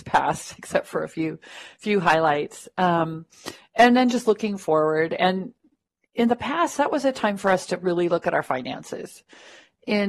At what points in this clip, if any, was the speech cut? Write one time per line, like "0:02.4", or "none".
none